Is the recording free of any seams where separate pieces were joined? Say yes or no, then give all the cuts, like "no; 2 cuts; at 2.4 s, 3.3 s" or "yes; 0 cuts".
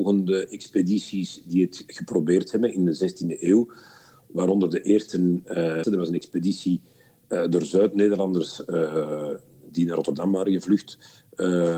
no; 1 cut; at 5.8 s